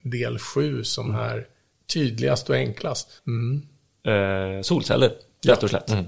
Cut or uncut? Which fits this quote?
cut